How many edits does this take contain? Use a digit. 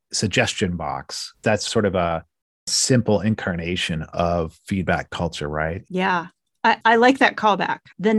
1